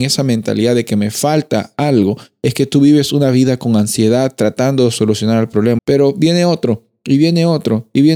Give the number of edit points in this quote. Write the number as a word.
one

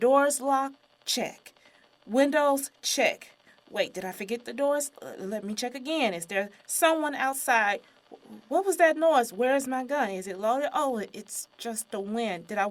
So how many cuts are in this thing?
zero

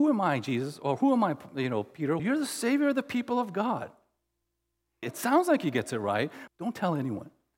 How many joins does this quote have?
three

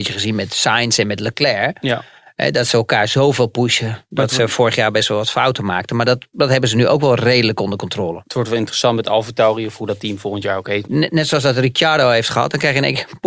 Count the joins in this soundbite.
one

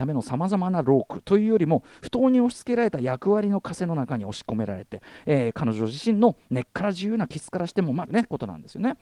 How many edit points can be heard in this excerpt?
one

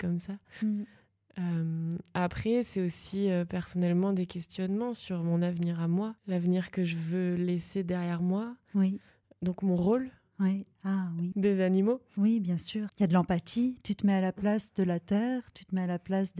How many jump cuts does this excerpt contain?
three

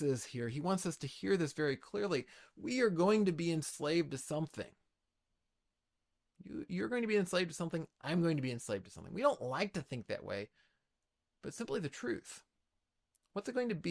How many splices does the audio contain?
zero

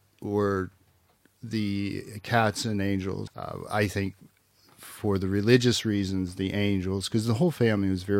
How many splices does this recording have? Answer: one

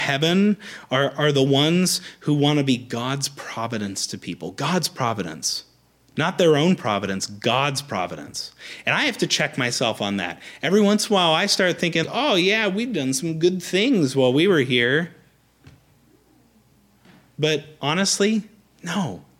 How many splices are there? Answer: one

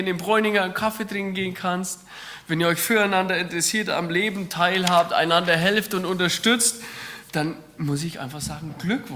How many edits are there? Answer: zero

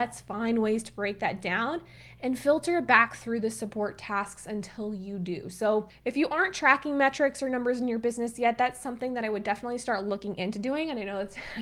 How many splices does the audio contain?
zero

